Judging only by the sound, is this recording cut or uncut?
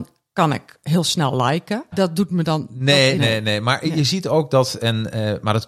cut